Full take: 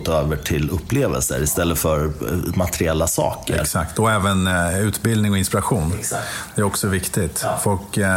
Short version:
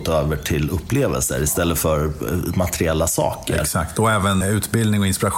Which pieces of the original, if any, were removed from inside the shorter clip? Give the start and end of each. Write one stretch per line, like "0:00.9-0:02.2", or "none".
0:04.4-0:04.7